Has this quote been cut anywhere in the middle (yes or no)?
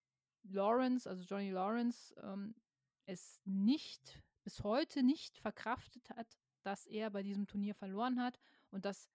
no